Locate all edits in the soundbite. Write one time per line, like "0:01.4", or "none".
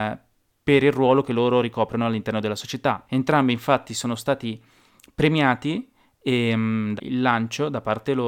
0:03.1
0:07.0